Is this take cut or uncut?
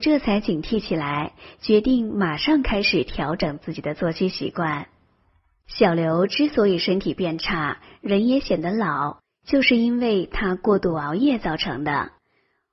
uncut